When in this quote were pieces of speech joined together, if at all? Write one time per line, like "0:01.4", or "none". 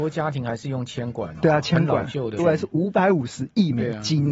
0:02.4